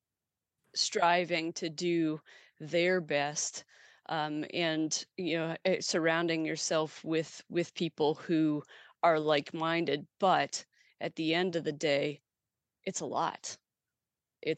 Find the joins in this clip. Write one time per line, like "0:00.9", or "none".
none